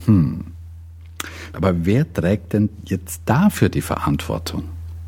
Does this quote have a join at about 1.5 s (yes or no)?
yes